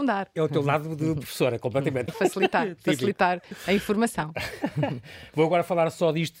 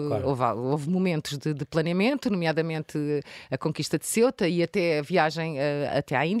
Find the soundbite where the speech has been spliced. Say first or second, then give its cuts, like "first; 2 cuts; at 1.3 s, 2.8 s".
first; 1 cut; at 2.1 s